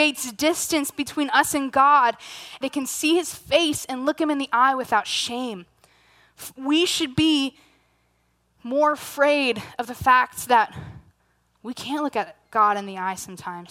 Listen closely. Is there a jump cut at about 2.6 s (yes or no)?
yes